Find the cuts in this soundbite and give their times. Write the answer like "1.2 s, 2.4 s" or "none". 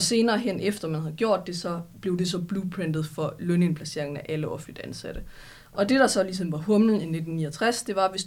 none